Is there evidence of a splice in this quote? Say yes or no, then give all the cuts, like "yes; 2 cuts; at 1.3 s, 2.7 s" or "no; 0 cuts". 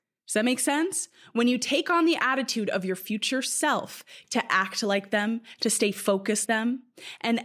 yes; 2 cuts; at 4.2 s, 6.5 s